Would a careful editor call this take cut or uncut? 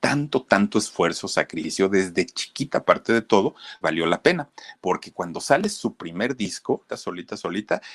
cut